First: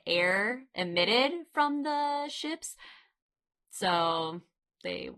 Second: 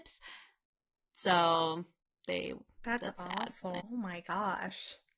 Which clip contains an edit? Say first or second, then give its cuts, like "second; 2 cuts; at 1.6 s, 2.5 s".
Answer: second; 2 cuts; at 2.8 s, 3.8 s